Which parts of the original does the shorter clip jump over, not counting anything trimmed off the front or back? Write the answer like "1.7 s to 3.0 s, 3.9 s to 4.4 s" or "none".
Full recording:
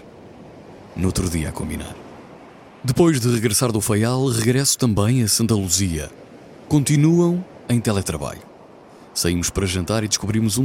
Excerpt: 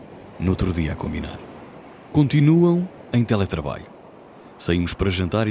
2.7 s to 6.7 s